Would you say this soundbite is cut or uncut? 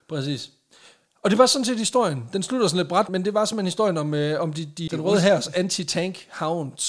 cut